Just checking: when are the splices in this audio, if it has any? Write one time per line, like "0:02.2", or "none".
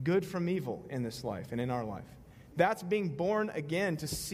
0:02.5